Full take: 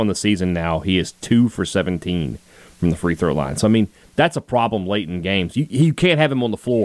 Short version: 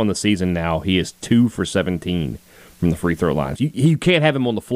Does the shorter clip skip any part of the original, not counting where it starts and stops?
yes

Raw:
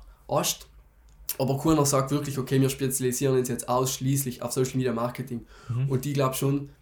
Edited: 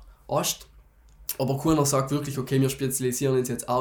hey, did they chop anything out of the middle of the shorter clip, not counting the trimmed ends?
no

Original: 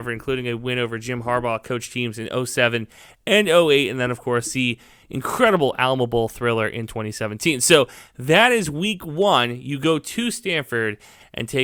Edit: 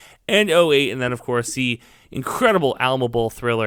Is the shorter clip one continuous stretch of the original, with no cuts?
yes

